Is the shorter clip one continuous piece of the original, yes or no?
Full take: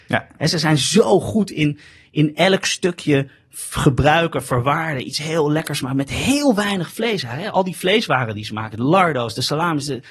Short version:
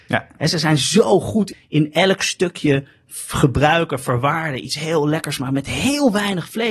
no